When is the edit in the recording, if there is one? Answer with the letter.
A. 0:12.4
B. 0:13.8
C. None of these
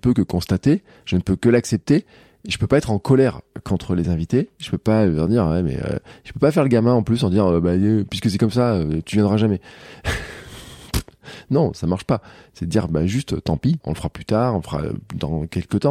B